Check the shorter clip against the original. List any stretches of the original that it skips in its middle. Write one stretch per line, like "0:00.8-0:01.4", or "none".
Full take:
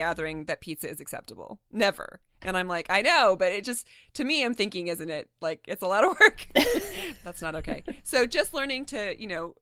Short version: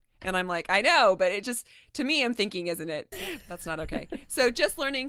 0:05.3-0:06.9